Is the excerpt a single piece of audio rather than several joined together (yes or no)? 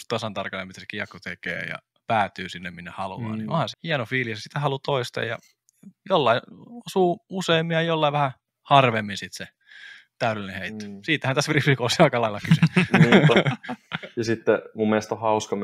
no